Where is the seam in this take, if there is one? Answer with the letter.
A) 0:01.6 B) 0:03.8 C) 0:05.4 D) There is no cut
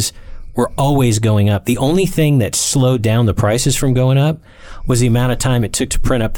D